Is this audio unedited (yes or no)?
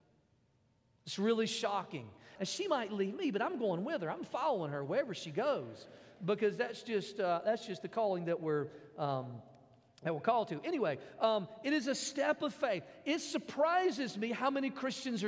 no